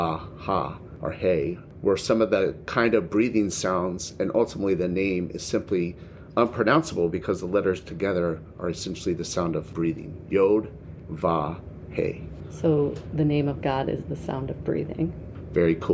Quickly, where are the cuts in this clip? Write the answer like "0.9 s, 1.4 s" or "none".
11.1 s